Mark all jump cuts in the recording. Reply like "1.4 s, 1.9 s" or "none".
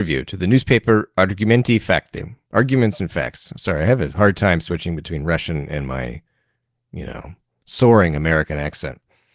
none